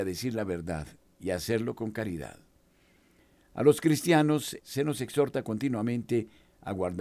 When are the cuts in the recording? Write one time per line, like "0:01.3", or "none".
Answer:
0:04.6